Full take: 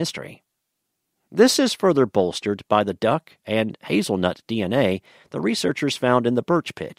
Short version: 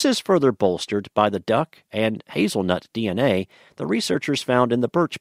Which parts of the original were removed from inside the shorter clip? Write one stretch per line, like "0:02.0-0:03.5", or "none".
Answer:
none